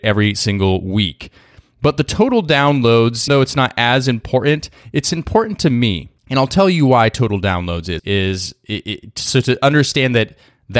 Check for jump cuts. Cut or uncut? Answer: cut